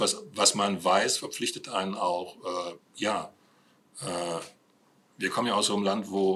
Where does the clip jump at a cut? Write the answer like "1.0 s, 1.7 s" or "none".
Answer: 2.8 s